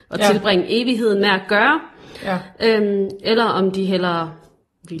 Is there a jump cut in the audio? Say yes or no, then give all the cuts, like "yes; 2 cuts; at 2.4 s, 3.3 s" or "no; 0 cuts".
no; 0 cuts